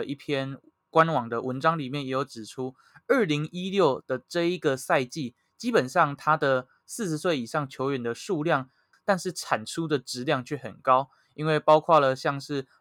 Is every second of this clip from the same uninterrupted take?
no; 1 cut; at 8.9 s

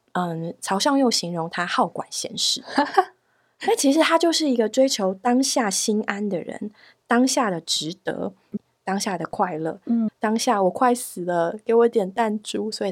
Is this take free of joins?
no; 2 cuts; at 8.6 s, 10.1 s

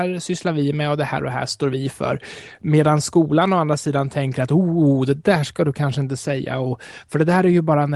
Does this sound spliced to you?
no; 0 cuts

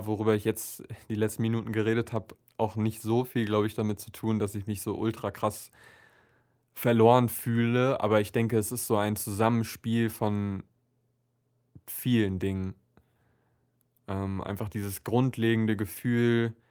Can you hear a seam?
no; 0 cuts

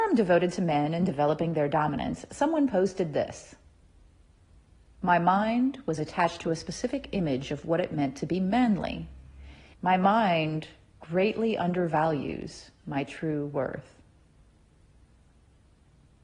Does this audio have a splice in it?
yes; 1 cut; at 9.7 s

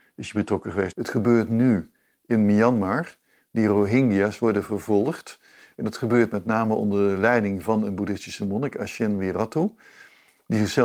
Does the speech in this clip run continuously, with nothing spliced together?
no; 1 cut; at 0.9 s

